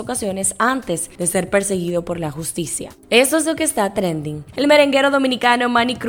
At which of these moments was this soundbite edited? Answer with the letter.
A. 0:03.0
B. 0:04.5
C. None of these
B